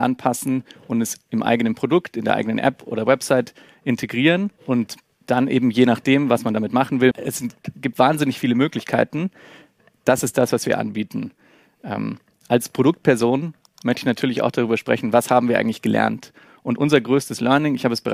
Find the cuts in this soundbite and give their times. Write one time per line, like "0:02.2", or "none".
0:04.6
0:07.1